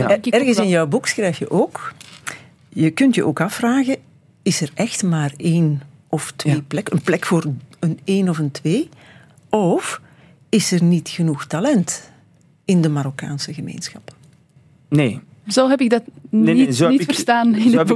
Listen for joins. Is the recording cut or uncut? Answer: uncut